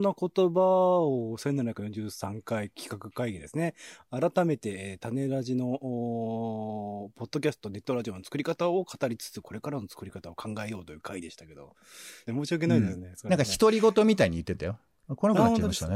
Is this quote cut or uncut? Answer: cut